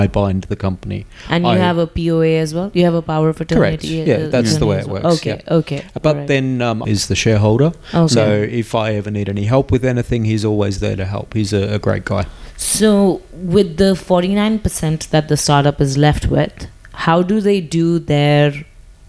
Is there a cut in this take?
yes; 1 cut; at 6.8 s

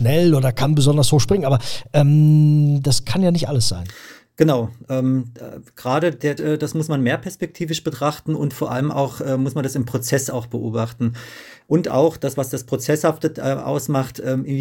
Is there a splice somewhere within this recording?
yes; 2 cuts; at 6.4 s, 11.6 s

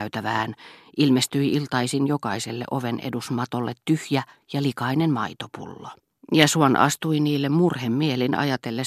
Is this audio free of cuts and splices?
no; 1 cut; at 6.2 s

